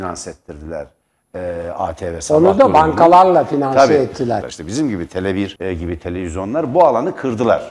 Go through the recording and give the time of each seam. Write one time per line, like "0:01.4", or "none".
0:04.4
0:05.6